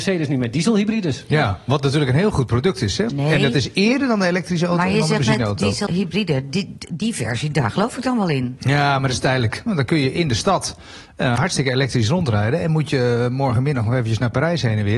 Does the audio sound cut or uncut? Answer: cut